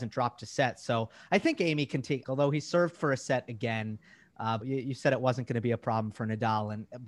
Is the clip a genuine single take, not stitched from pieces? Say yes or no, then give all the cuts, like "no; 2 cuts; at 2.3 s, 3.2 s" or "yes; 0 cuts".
no; 2 cuts; at 2.2 s, 4.6 s